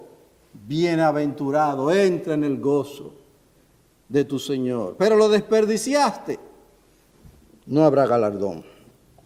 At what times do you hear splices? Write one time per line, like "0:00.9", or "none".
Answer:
none